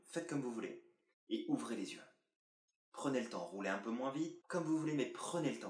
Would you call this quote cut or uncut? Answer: cut